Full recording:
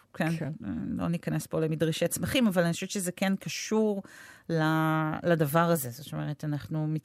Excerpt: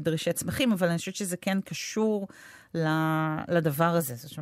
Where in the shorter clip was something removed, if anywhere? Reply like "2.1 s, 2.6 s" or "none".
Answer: none